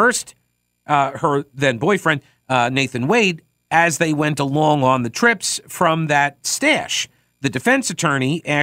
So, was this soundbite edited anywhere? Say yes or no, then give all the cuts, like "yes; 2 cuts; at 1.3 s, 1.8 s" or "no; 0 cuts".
no; 0 cuts